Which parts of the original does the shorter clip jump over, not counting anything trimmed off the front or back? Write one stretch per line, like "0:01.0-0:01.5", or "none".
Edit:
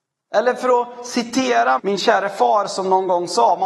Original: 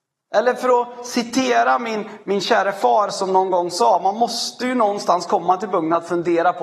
0:01.8-0:02.2